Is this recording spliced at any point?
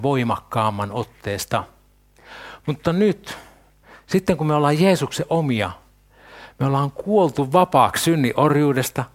no; 0 cuts

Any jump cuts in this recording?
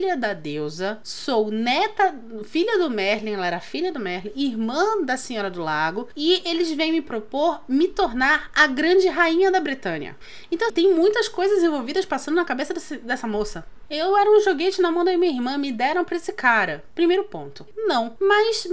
yes; 3 cuts; at 10.7 s, 13.9 s, 17.7 s

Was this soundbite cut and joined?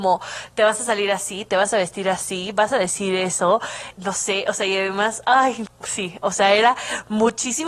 yes; 2 cuts; at 3.9 s, 5.7 s

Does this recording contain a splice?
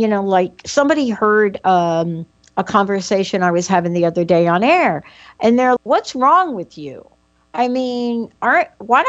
yes; 1 cut; at 5.8 s

